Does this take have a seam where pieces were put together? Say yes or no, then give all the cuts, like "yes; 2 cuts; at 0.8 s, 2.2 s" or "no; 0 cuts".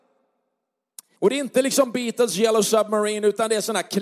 yes; 1 cut; at 1.2 s